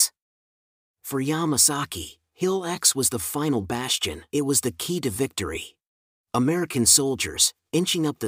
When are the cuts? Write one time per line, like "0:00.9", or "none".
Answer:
0:04.3
0:06.1